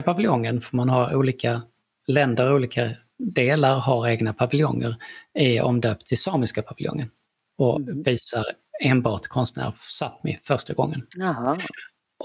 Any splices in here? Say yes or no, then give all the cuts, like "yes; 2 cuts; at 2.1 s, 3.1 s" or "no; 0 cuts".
no; 0 cuts